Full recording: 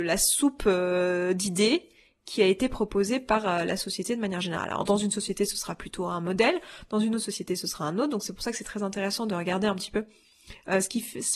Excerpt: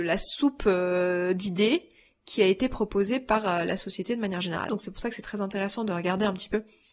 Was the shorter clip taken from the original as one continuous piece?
no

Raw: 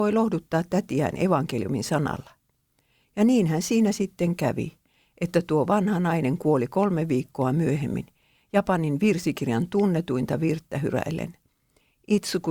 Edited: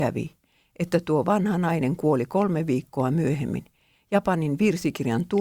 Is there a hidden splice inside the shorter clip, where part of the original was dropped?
no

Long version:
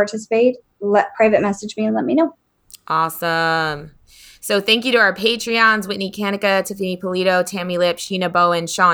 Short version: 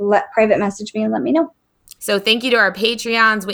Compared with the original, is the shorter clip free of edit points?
no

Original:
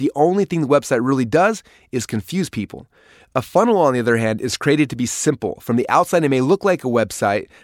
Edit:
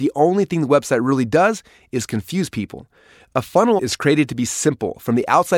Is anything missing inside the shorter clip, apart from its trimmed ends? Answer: yes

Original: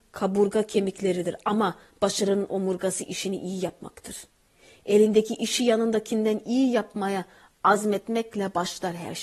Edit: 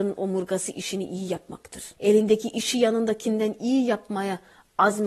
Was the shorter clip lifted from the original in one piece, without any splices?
no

